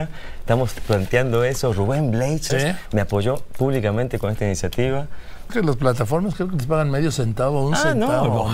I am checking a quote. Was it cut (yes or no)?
yes